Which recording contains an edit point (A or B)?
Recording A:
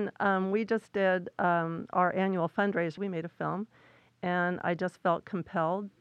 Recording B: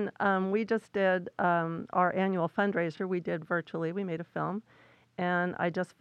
A